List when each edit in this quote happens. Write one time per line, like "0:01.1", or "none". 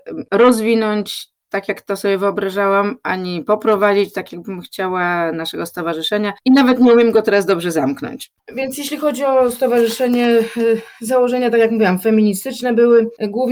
none